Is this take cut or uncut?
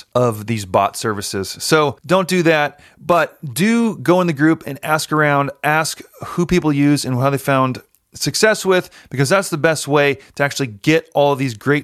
uncut